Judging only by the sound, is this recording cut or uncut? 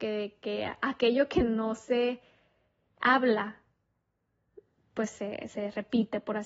uncut